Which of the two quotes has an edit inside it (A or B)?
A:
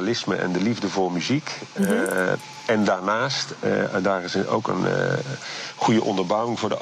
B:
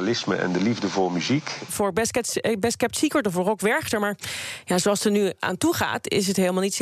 B